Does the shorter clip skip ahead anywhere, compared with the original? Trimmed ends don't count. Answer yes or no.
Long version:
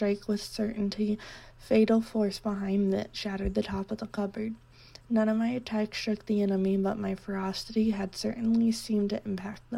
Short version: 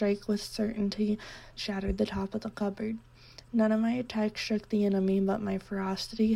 yes